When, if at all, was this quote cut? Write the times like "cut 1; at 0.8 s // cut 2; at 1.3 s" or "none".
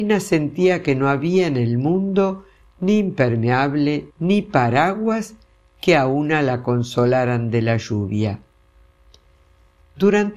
cut 1; at 4.1 s